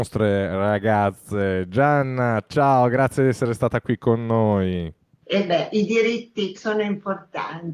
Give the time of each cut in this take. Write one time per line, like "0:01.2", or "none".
0:05.2
0:06.5